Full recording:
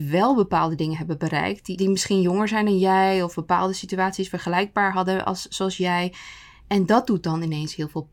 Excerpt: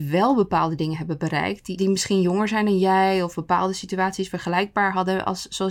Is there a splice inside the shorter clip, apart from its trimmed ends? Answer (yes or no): no